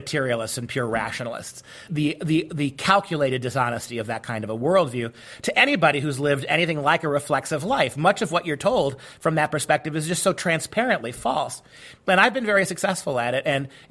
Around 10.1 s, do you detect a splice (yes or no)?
no